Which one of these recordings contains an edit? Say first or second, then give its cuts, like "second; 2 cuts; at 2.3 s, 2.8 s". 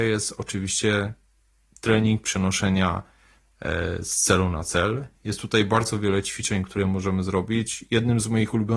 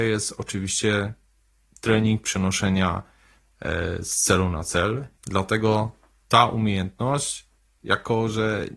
second; 1 cut; at 5.2 s